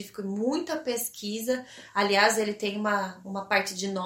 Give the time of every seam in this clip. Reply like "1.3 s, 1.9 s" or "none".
none